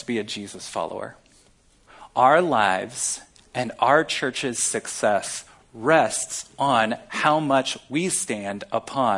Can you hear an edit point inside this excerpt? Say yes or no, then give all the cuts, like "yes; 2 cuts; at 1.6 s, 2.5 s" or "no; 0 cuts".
no; 0 cuts